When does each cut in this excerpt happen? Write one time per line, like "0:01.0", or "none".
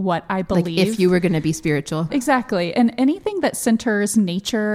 0:02.1